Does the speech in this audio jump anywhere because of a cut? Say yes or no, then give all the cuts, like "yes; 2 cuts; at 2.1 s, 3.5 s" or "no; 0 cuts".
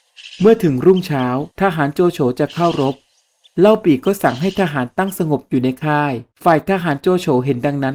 yes; 2 cuts; at 1.5 s, 6.3 s